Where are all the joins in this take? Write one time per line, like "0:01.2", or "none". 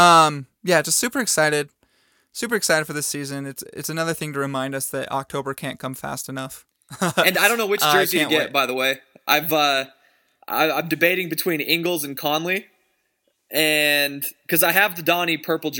none